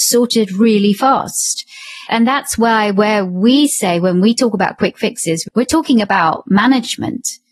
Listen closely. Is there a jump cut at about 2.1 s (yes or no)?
yes